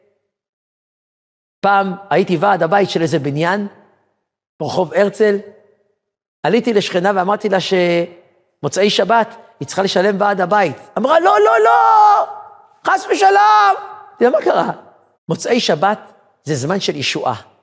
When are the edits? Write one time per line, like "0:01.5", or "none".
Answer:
0:15.1